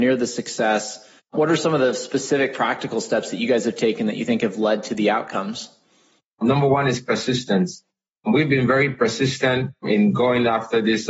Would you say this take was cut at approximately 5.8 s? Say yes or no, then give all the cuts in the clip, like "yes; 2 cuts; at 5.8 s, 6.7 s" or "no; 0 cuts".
no; 0 cuts